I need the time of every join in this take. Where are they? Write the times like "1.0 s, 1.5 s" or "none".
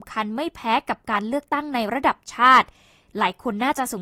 none